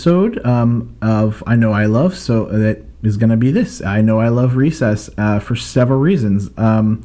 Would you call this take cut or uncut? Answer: uncut